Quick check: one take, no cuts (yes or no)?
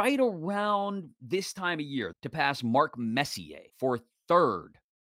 no